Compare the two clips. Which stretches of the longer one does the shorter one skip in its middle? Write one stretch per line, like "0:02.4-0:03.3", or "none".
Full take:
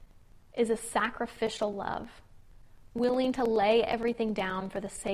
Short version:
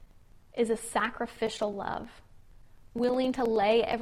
none